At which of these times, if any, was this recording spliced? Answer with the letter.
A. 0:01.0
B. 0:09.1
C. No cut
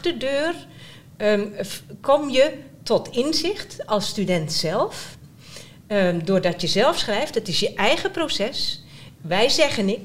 C